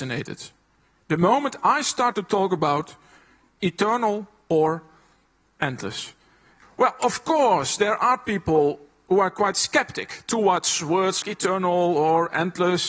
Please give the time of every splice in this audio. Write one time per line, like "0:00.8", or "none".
0:06.6
0:11.2